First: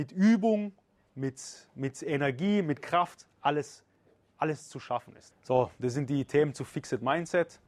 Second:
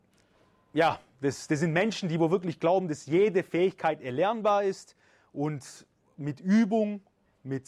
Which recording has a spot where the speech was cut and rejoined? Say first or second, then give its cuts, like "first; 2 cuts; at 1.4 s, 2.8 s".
first; 1 cut; at 5.3 s